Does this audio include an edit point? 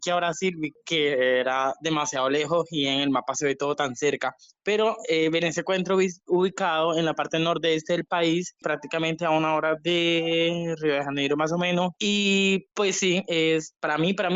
no; 0 cuts

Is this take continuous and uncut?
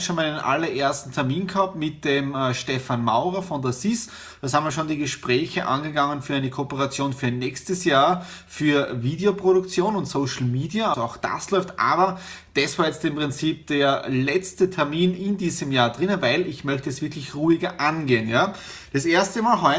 no; 1 cut; at 10.9 s

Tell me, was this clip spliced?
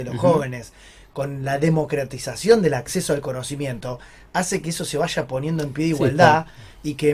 no; 0 cuts

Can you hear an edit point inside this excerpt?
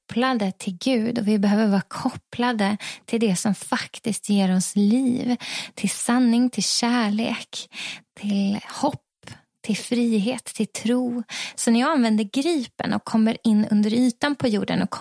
yes; 1 cut; at 11.5 s

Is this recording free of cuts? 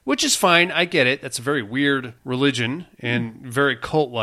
no; 1 cut; at 2.2 s

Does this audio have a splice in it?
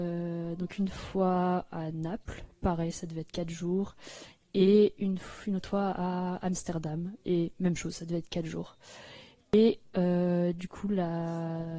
no; 0 cuts

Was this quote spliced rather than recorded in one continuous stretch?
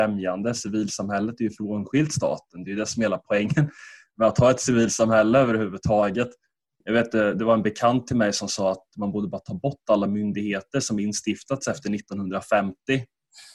yes; 1 cut; at 6.8 s

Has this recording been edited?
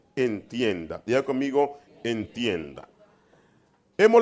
yes; 1 cut; at 1.9 s

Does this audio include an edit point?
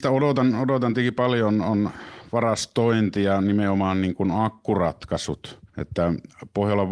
yes; 1 cut; at 5.7 s

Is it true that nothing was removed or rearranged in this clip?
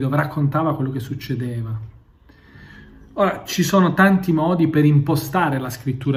yes; 0 cuts

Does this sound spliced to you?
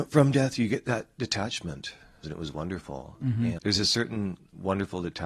yes; 2 cuts; at 2.2 s, 3.6 s

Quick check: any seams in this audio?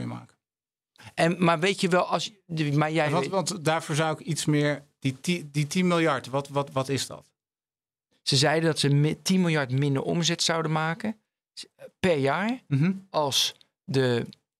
no; 0 cuts

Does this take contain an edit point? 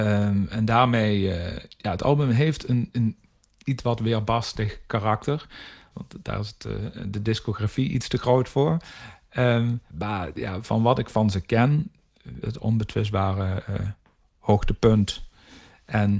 yes; 3 cuts; at 5.9 s, 9.9 s, 12.4 s

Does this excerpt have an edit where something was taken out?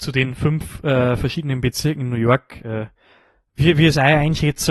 yes; 1 cut; at 3.4 s

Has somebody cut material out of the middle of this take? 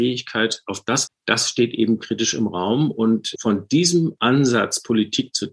yes; 2 cuts; at 1.1 s, 3.4 s

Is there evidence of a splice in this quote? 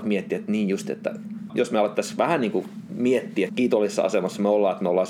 yes; 2 cuts; at 1.5 s, 3.5 s

